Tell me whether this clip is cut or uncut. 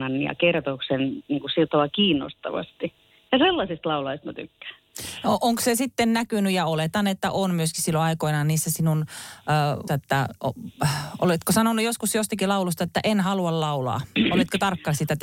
cut